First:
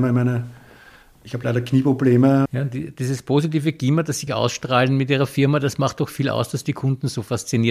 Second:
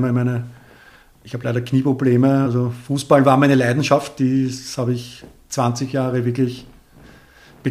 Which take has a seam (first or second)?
first